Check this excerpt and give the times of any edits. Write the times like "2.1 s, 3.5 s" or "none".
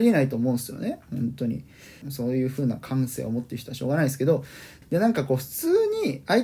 2.0 s, 4.8 s